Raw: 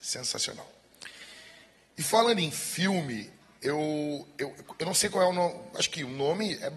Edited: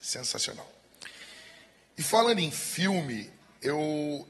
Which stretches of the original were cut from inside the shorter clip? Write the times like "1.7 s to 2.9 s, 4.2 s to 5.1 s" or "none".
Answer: none